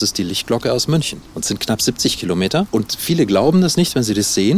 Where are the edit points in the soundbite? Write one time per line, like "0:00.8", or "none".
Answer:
none